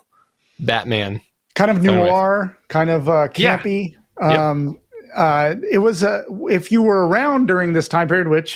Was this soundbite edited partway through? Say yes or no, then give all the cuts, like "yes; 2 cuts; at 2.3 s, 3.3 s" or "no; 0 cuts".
no; 0 cuts